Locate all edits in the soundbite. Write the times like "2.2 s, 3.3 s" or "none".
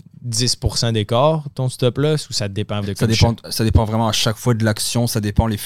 2.8 s